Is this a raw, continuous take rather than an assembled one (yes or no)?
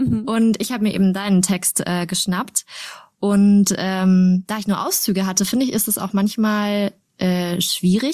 yes